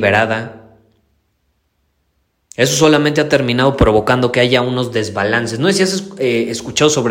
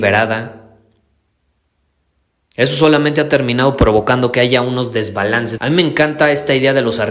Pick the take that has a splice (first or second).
second